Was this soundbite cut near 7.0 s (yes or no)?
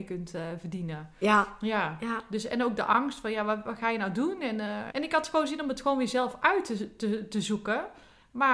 no